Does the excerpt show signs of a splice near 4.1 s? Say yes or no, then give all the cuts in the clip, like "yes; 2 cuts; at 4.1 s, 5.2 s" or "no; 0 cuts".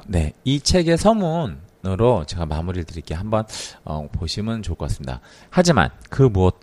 yes; 2 cuts; at 4.1 s, 5.4 s